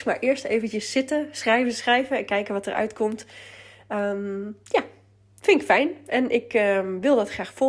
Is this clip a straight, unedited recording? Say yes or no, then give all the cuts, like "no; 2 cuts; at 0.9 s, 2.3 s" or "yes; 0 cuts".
no; 1 cut; at 1.7 s